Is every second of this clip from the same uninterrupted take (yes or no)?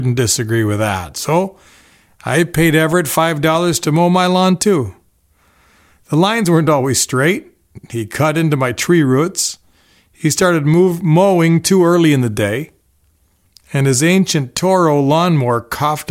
yes